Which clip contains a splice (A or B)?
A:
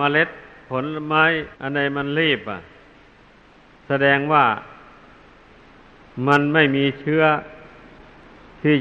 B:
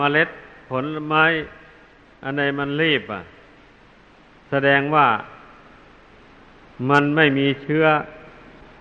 A